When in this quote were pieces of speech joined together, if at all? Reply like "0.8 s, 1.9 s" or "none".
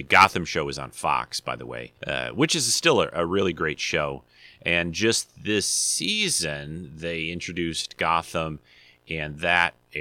2.0 s

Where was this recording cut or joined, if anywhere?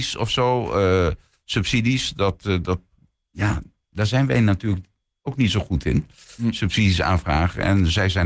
none

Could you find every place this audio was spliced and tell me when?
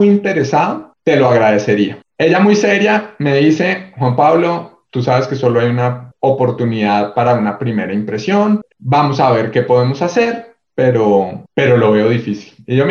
none

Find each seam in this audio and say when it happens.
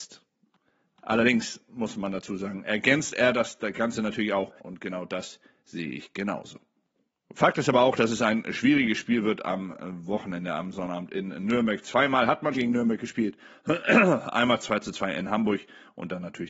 4.6 s, 12.5 s

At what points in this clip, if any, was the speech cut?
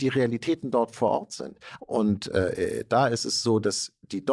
1.8 s

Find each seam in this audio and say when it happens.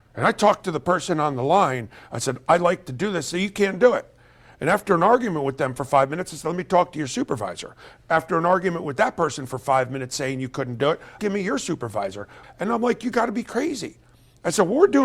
11.2 s, 12.4 s

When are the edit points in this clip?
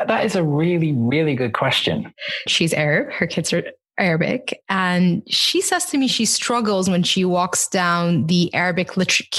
2.5 s

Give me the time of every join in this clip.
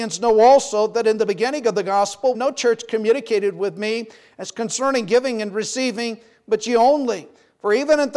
2.3 s

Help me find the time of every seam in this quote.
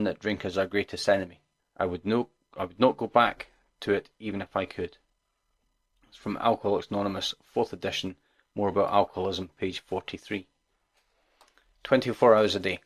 1.6 s

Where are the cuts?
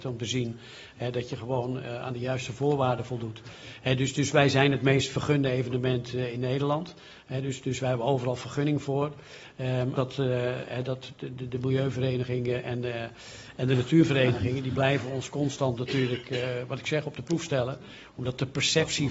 10.0 s

